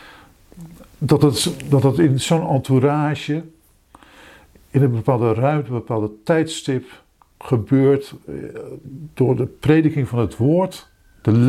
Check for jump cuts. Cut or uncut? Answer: uncut